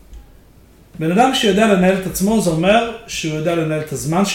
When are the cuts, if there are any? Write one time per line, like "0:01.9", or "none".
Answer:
none